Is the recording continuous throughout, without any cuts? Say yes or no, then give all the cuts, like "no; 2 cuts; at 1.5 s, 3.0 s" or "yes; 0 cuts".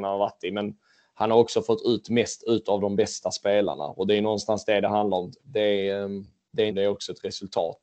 no; 2 cuts; at 5.4 s, 6.7 s